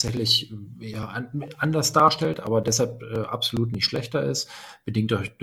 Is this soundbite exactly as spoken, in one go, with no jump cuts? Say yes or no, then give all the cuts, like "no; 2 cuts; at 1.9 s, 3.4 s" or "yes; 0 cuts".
yes; 0 cuts